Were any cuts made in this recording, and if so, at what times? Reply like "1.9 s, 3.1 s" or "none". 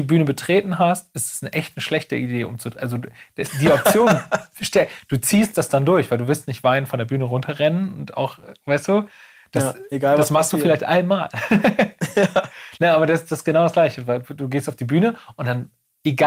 none